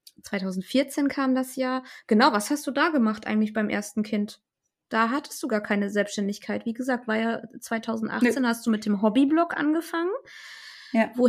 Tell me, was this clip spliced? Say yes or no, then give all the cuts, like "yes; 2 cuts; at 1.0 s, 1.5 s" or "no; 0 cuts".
no; 0 cuts